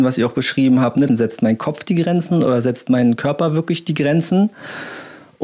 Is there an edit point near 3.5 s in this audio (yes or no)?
no